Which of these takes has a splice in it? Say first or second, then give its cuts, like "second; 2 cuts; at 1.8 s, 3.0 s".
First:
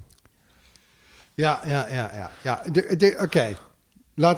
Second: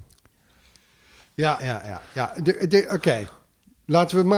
second; 1 cut; at 1.6 s